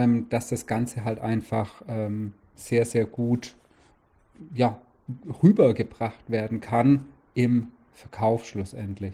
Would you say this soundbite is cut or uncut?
uncut